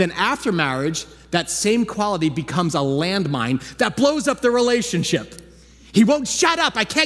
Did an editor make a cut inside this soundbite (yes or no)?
no